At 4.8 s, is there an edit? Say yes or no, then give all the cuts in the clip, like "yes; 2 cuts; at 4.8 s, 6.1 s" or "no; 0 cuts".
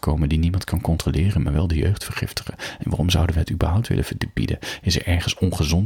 no; 0 cuts